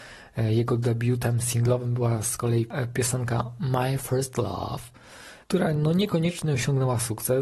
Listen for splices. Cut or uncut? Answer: cut